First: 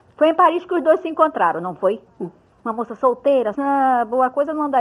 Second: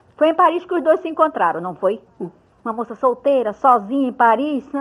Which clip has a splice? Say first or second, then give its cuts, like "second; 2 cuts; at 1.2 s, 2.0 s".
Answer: first; 1 cut; at 3.5 s